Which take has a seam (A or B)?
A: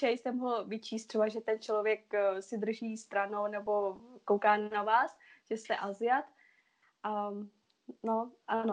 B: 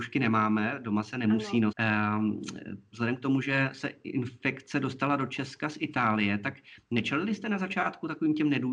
B